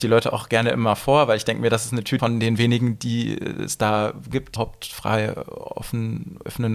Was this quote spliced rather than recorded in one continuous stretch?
yes; 2 cuts; at 2.2 s, 4.6 s

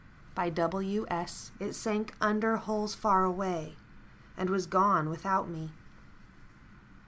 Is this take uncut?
no; 1 cut; at 1.5 s

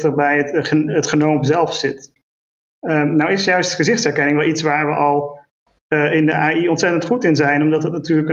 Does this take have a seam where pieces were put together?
no; 0 cuts

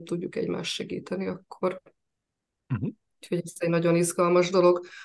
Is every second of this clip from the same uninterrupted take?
yes; 0 cuts

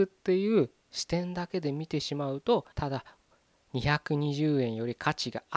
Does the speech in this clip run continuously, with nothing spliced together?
no; 1 cut; at 2.7 s

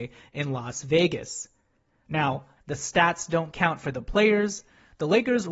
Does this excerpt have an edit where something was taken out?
yes; 1 cut; at 2.6 s

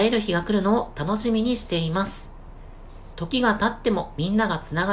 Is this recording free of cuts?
no; 1 cut; at 3.1 s

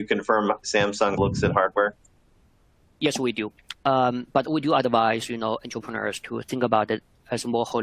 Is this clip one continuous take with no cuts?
no; 1 cut; at 1.2 s

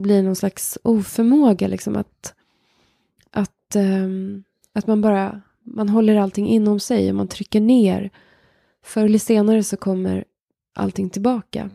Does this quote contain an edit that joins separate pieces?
no; 0 cuts

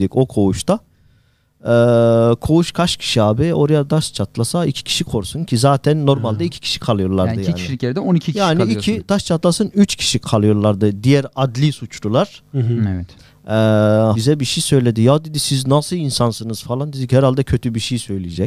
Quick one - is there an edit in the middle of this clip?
yes; 1 cut; at 14.1 s

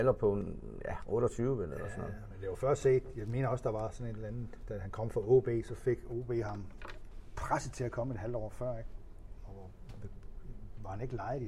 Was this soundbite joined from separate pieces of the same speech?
no; 0 cuts

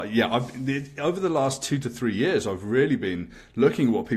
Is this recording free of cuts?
yes; 0 cuts

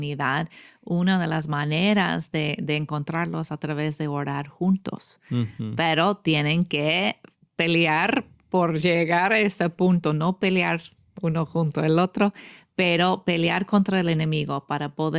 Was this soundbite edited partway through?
no; 0 cuts

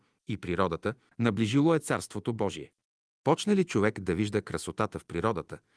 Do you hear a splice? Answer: yes; 2 cuts; at 1.1 s, 3.1 s

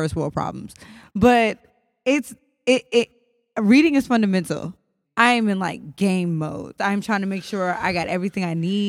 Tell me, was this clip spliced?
yes; 2 cuts; at 5.0 s, 6.8 s

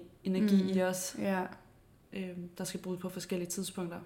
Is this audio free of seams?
yes; 0 cuts

